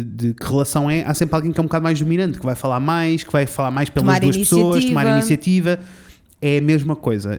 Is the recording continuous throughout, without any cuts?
yes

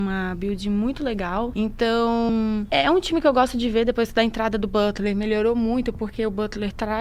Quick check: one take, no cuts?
yes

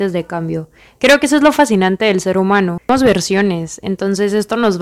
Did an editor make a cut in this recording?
no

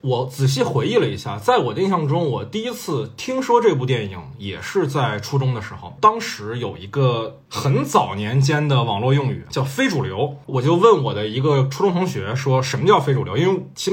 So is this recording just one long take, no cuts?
no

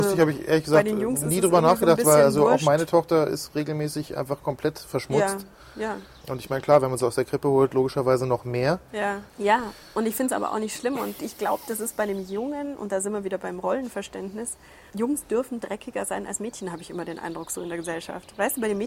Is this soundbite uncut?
no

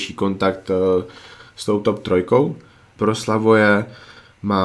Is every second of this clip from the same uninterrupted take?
no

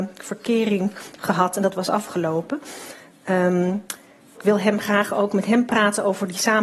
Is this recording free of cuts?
no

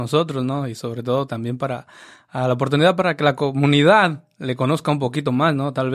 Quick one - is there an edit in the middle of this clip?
yes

